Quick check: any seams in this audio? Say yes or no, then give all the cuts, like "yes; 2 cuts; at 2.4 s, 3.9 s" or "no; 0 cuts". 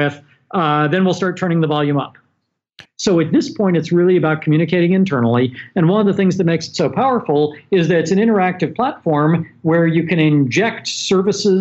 yes; 1 cut; at 2.8 s